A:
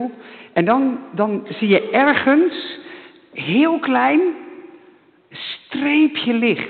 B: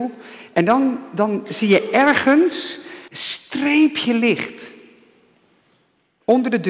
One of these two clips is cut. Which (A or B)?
B